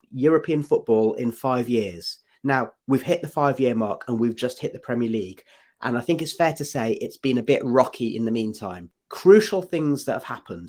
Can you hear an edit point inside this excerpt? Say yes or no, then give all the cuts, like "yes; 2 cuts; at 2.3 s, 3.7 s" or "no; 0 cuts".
yes; 2 cuts; at 2.8 s, 8.9 s